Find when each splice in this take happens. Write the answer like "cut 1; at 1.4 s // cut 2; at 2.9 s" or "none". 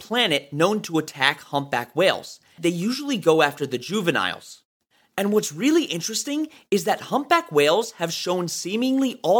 cut 1; at 2.6 s